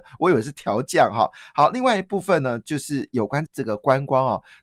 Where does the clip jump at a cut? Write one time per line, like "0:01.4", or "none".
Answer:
0:03.5